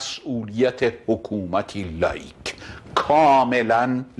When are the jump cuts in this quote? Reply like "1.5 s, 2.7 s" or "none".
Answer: none